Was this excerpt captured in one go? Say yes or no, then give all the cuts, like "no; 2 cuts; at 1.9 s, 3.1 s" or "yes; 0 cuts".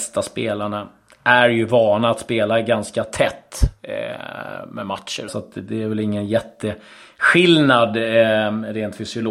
no; 1 cut; at 5.3 s